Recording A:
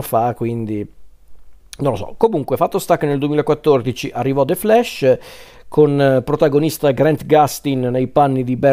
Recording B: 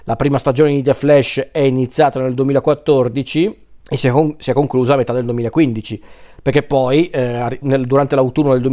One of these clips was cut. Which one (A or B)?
B